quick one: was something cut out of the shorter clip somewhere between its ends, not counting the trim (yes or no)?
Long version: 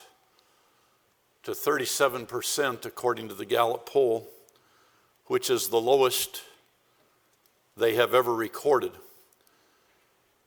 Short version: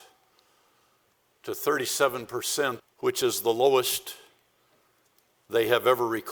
yes